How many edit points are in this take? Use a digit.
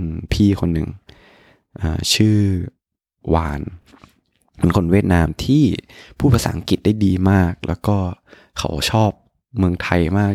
0